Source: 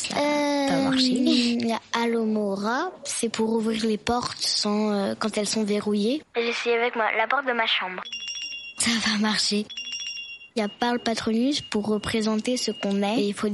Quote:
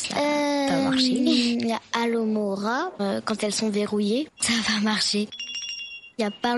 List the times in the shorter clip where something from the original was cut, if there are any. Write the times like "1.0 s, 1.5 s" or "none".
3.0 s, 4.4 s

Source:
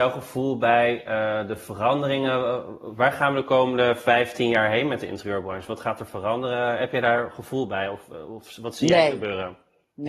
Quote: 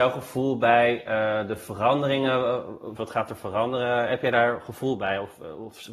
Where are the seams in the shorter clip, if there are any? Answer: 3.0 s

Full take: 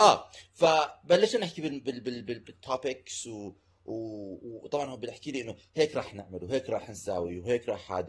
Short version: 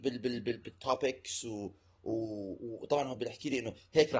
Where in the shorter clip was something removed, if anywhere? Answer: none

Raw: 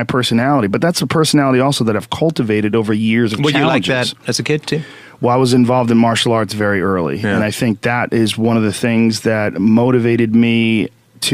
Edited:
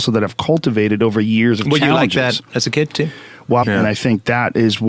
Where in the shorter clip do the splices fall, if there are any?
3.6 s

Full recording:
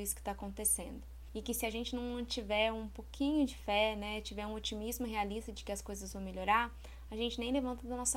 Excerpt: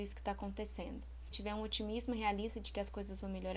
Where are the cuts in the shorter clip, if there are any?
1.3 s

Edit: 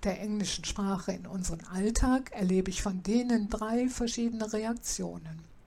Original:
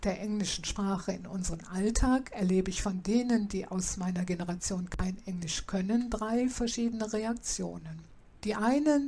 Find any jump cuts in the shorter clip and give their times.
3.5 s

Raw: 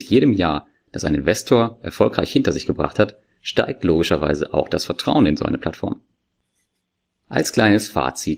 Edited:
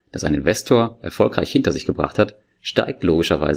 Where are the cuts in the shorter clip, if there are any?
none

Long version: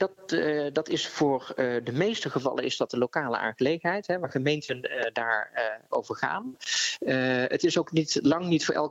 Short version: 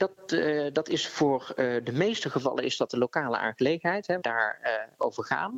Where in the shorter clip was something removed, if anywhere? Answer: 4.2 s

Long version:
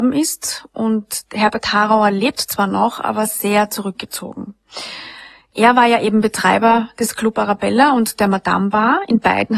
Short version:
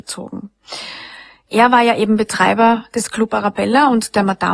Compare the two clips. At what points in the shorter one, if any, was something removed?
none

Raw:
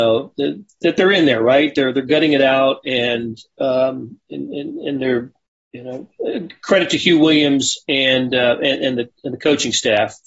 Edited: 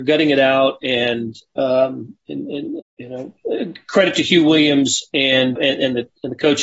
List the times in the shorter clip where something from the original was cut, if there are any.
2.8 s, 5.6 s

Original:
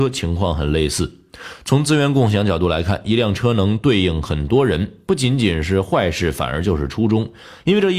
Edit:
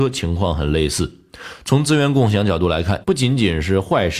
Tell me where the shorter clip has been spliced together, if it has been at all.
3.0 s

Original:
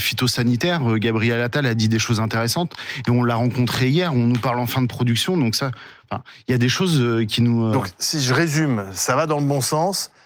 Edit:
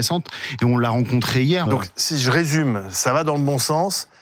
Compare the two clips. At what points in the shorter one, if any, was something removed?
1.7 s

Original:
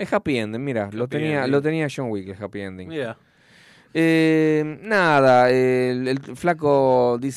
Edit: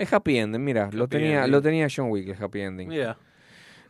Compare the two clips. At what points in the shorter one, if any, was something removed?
none

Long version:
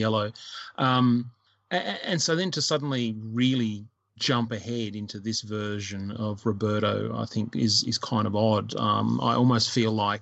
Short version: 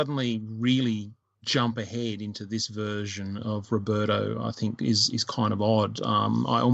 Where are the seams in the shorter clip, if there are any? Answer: none

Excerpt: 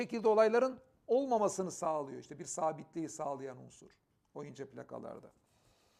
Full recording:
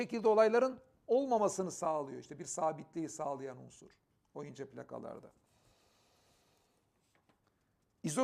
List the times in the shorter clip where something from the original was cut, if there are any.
none

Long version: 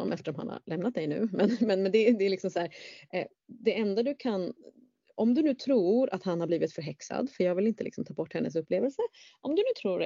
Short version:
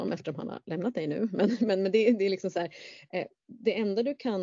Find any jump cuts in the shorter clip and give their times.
none

